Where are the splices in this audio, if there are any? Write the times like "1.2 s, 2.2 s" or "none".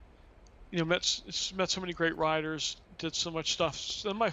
none